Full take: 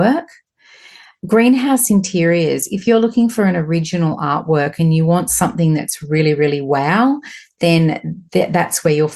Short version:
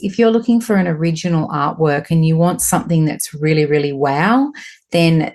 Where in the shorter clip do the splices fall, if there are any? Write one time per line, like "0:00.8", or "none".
none